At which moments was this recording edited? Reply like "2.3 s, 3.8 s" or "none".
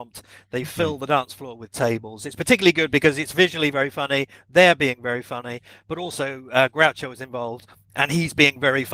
none